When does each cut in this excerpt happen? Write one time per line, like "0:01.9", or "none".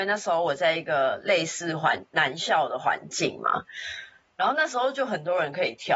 none